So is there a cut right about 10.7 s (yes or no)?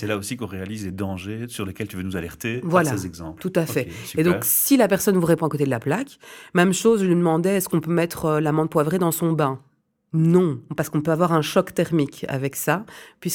yes